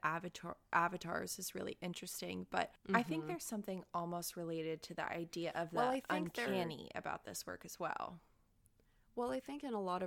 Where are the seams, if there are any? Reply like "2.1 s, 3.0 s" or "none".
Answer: none